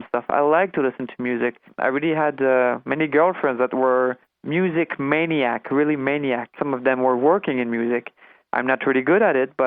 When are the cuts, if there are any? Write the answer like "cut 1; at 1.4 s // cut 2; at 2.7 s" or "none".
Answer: cut 1; at 8.5 s